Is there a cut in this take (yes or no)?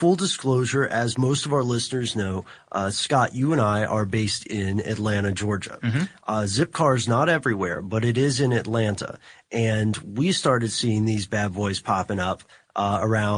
no